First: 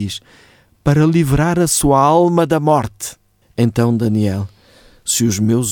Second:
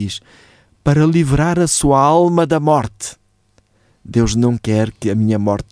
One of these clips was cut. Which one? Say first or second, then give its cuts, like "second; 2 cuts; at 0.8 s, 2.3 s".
first; 1 cut; at 3.4 s